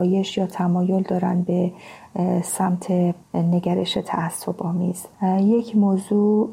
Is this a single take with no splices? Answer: no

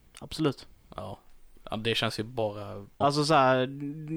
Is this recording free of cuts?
no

